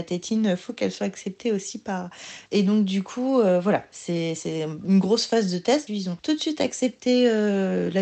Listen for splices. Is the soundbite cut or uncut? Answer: cut